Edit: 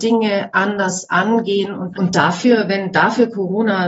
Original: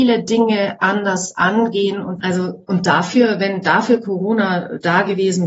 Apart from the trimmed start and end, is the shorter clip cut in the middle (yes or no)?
yes